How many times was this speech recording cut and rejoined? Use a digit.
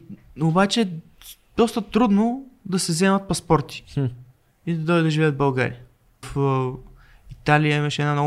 1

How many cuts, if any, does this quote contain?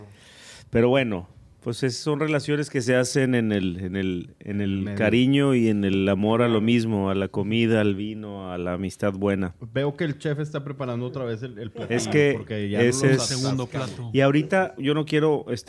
1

